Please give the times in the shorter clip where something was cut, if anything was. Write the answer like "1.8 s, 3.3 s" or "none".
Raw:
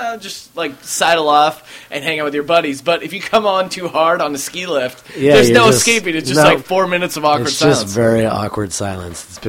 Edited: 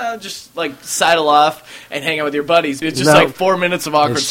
2.8 s